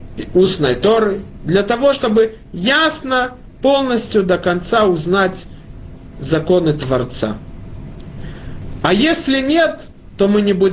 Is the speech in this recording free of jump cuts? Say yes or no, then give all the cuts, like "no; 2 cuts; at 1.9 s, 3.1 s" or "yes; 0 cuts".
yes; 0 cuts